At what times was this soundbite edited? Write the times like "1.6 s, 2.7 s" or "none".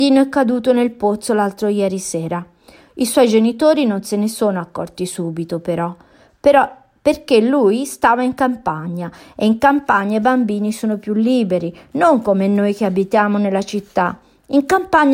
none